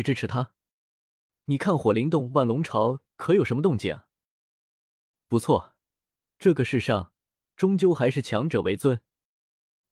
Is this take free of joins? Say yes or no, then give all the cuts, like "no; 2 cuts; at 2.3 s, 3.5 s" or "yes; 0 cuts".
no; 1 cut; at 3.1 s